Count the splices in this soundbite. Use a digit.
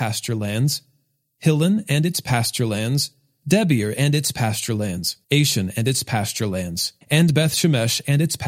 2